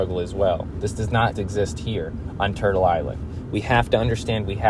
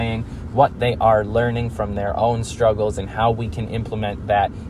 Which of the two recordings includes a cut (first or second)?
first